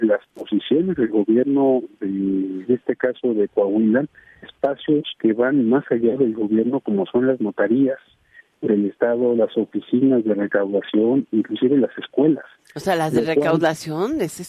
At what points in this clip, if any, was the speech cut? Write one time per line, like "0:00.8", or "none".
0:02.6
0:04.4